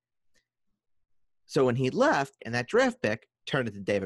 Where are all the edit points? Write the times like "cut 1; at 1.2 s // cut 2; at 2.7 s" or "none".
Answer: cut 1; at 2.4 s